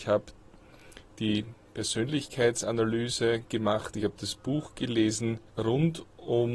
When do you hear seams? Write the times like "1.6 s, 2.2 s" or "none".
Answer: 5.5 s